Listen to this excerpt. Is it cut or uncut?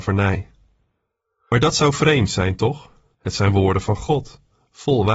cut